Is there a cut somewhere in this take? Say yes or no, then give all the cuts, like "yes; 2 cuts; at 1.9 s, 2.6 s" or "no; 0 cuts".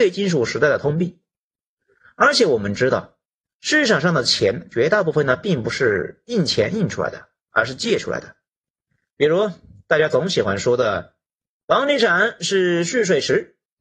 no; 0 cuts